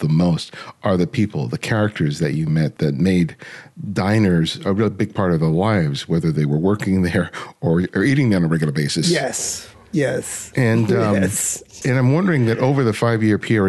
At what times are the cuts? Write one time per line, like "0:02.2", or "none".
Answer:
0:11.8